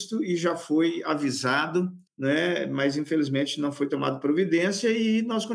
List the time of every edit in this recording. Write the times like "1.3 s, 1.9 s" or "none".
2.1 s